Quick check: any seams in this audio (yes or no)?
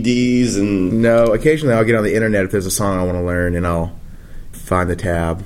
yes